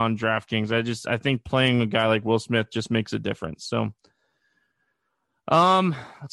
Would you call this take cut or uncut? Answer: uncut